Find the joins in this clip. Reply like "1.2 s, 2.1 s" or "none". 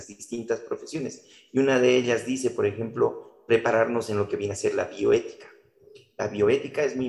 none